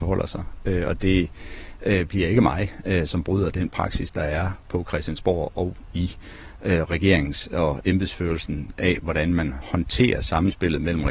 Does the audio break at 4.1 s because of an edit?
no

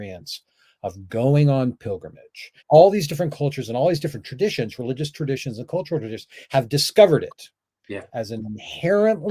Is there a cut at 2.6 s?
yes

